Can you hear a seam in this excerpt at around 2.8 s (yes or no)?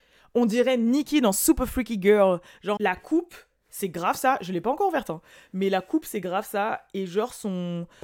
yes